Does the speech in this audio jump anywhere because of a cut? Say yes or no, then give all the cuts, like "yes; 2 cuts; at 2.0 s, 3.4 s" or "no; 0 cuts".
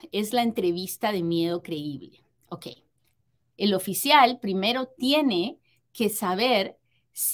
yes; 1 cut; at 3.5 s